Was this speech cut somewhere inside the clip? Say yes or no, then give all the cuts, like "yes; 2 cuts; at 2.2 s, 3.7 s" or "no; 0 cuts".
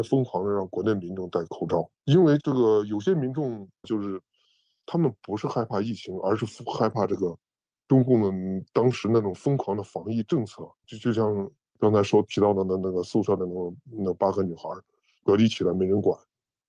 yes; 3 cuts; at 1.9 s, 3.8 s, 10.8 s